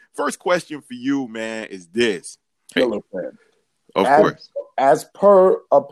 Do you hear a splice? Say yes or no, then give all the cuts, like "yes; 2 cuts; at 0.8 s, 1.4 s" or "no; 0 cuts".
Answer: yes; 1 cut; at 2.8 s